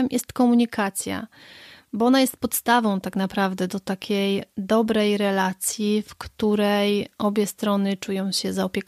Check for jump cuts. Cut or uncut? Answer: uncut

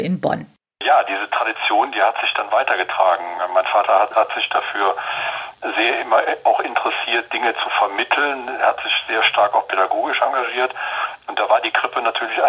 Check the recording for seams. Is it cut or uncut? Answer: cut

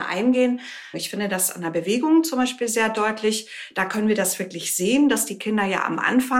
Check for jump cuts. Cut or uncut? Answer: cut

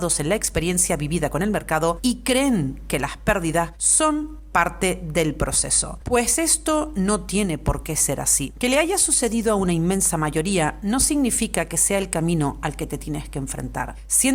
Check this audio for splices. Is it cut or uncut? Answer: uncut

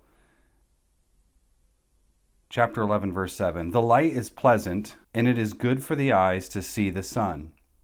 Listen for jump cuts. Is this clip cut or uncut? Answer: cut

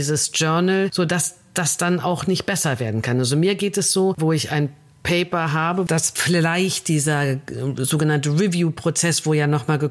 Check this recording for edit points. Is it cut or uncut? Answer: cut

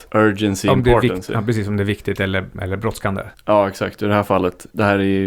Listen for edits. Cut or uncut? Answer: uncut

